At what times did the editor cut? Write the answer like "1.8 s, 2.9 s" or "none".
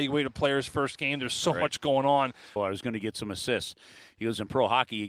2.6 s